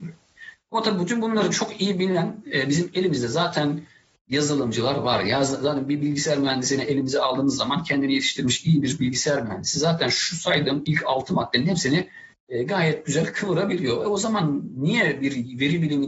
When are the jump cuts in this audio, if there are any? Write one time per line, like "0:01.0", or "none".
none